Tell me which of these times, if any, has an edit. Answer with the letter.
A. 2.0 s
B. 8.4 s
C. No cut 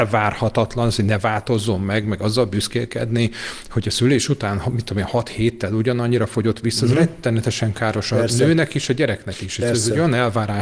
C